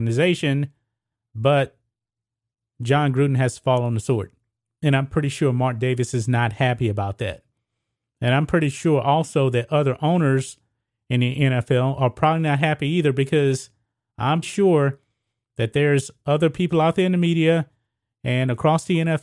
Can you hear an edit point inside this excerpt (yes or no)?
yes